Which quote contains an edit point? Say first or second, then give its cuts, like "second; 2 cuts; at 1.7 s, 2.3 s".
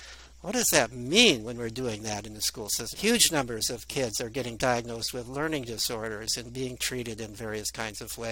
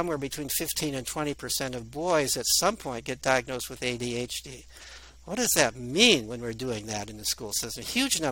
first; 1 cut; at 2.9 s